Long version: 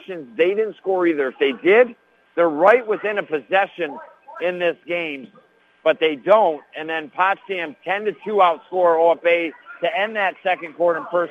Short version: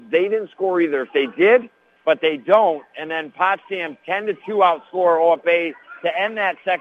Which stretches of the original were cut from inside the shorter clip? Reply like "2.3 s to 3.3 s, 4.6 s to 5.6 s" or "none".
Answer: 2.2 s to 5.7 s

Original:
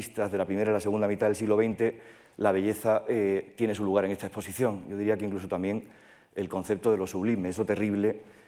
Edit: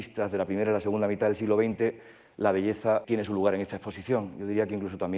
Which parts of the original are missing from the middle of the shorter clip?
3.0 s to 3.5 s

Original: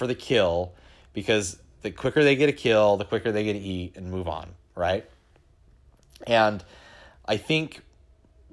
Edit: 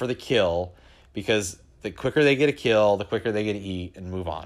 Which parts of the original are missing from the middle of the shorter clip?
none

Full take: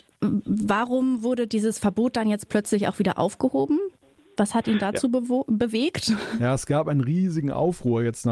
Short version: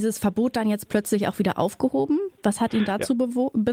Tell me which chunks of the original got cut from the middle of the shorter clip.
4.0 s to 4.3 s

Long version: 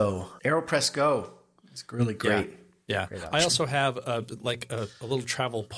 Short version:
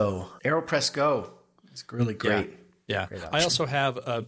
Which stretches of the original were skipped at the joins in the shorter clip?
none

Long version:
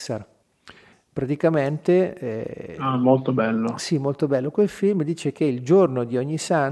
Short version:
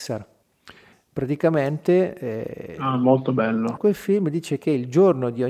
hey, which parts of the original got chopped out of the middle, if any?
3.8 s to 4.5 s

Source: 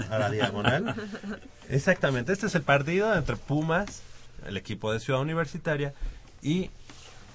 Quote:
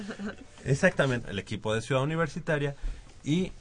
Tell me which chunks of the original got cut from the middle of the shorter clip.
2.3 s to 4.4 s

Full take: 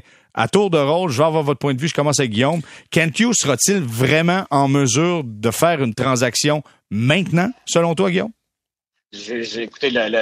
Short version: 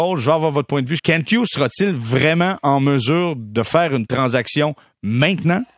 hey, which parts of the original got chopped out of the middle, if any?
1.9 s to 2.9 s

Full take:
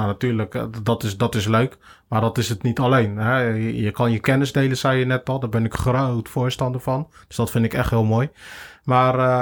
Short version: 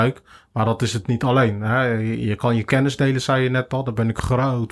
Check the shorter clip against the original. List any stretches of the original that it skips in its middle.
none

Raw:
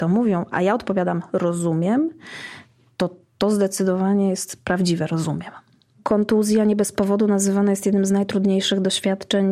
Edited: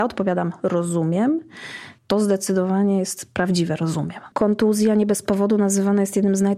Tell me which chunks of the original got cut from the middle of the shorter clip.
2.7 s to 3.3 s, 5.6 s to 6.0 s

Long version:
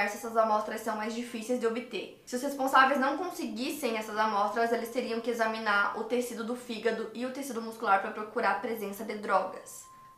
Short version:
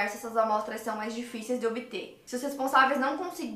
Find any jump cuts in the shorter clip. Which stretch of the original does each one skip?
none

